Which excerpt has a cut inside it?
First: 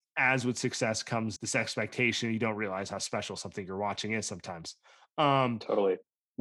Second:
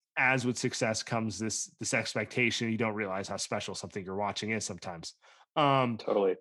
first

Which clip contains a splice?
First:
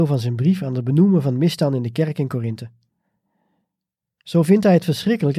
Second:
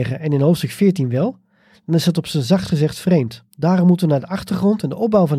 second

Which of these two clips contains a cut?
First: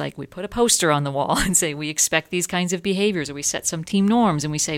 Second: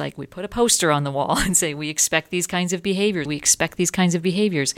second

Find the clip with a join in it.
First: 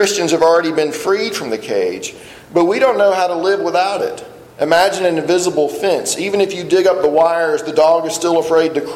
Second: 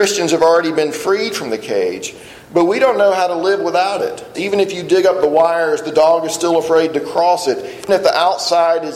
second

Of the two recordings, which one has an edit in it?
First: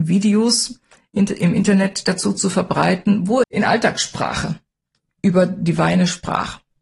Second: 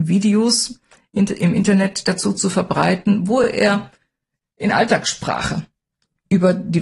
first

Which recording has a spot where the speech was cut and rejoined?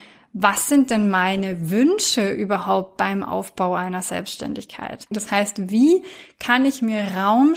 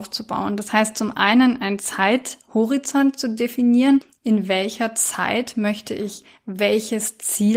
first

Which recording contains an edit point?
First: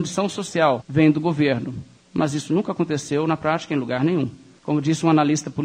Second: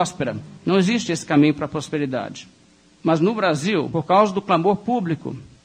first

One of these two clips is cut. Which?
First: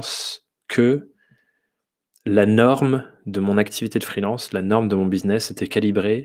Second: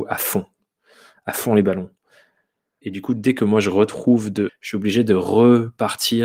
second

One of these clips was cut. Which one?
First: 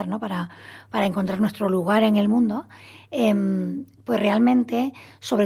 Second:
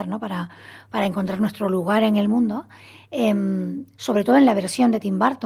second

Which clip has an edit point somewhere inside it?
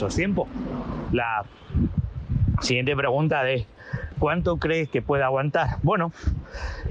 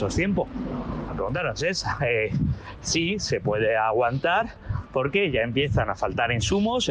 first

